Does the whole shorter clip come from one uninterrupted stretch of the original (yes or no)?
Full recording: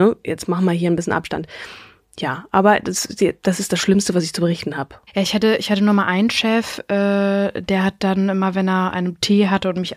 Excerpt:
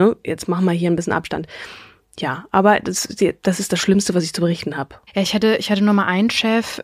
yes